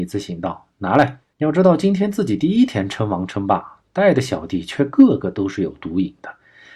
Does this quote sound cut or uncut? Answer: cut